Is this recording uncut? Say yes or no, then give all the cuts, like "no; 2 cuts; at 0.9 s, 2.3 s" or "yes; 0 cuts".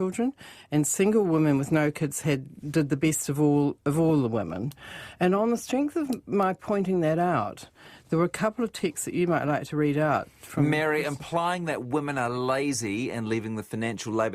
yes; 0 cuts